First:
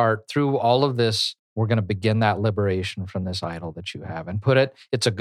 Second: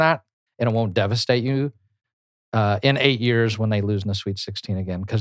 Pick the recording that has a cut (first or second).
first